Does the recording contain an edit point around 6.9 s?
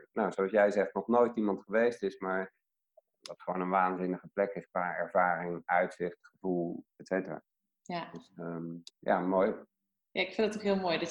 yes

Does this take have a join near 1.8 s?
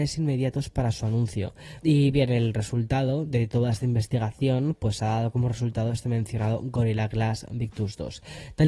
yes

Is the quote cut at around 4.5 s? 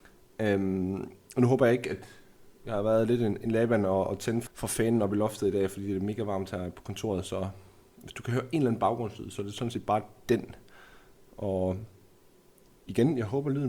yes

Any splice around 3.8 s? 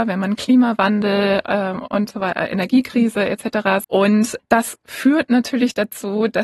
yes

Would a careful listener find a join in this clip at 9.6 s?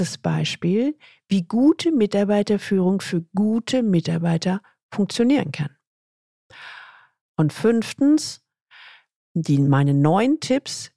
no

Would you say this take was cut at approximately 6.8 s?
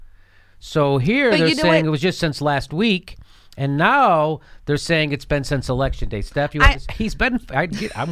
yes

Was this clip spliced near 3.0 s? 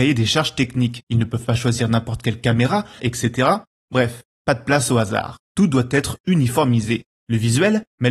yes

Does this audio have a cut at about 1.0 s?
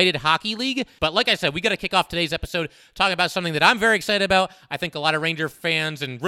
yes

